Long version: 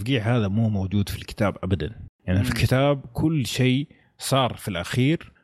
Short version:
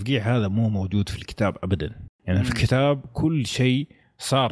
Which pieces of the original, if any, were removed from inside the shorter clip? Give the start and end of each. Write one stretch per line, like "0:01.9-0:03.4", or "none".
none